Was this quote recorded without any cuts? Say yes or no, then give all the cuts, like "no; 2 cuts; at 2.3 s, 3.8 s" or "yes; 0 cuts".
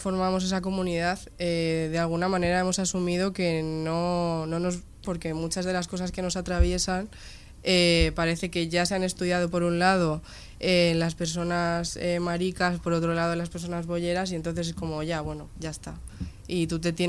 no; 1 cut; at 5.0 s